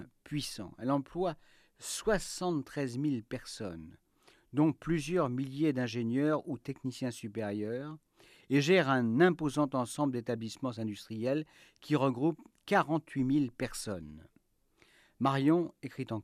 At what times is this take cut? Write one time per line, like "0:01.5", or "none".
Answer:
none